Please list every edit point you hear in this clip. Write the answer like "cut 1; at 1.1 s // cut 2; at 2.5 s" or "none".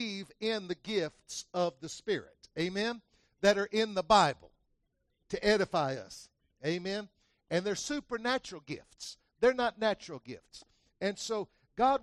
cut 1; at 5.1 s